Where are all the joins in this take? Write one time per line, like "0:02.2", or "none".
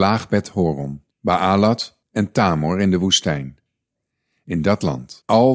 none